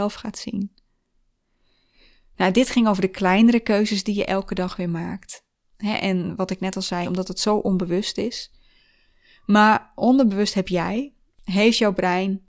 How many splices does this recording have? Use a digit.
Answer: 1